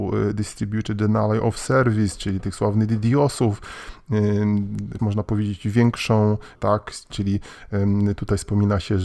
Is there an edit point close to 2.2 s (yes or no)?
no